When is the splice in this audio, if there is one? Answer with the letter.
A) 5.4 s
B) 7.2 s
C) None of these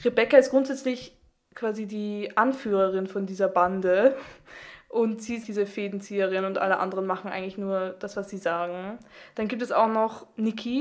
A